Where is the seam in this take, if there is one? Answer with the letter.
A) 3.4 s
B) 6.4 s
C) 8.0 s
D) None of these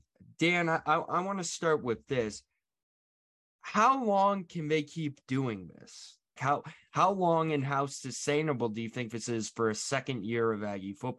B